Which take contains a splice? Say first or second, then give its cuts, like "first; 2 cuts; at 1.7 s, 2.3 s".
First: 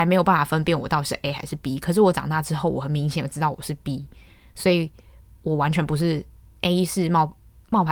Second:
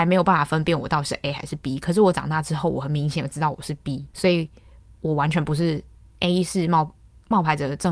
second; 1 cut; at 4.1 s